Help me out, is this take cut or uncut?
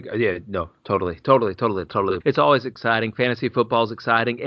cut